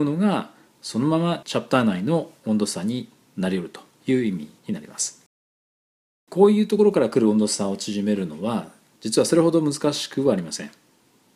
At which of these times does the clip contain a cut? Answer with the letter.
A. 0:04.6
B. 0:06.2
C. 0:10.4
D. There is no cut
A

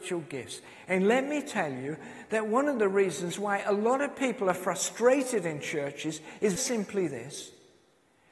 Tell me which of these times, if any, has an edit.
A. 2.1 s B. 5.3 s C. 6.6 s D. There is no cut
C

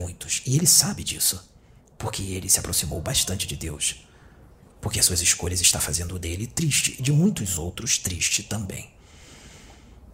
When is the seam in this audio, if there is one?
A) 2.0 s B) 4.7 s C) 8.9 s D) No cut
B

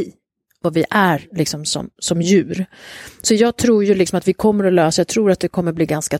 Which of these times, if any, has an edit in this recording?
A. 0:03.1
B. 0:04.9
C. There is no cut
C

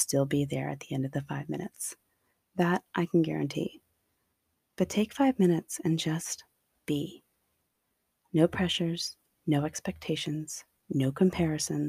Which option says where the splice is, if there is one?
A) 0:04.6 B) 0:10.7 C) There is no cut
C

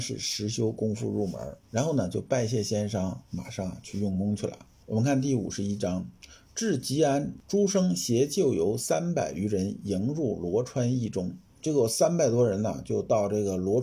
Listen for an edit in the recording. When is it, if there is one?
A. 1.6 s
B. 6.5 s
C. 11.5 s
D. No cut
C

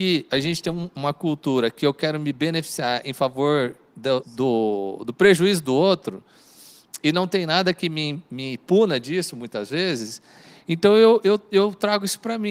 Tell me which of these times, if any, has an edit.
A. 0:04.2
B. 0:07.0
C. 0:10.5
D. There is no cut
A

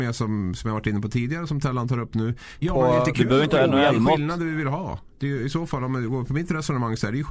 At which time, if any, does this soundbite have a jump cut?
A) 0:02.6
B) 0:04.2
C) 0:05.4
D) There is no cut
A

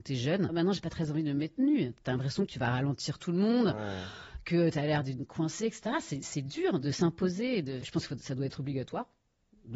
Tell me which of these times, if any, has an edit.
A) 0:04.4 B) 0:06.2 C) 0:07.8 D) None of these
C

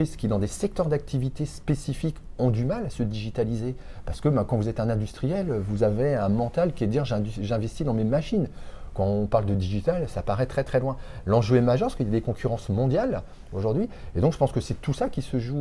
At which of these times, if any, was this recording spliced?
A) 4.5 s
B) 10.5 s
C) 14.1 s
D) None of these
D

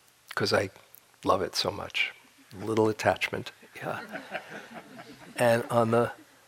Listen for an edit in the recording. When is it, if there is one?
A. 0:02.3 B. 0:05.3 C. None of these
C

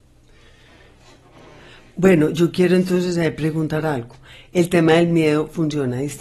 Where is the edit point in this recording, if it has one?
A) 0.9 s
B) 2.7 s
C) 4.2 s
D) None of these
D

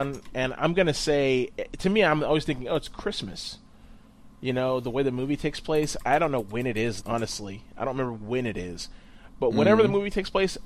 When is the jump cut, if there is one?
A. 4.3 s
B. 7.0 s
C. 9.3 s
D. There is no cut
B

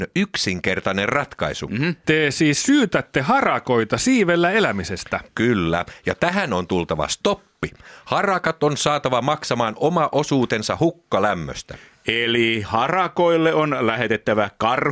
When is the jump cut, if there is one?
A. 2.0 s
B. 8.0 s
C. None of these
A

